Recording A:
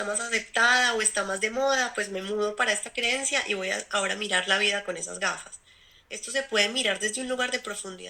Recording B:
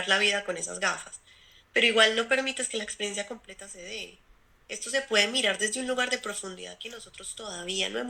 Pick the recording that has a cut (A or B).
A